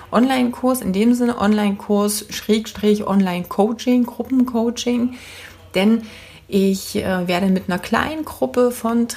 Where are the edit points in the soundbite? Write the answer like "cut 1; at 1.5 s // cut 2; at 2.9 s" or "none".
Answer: none